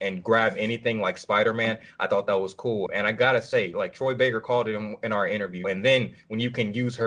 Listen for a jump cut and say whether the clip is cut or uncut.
cut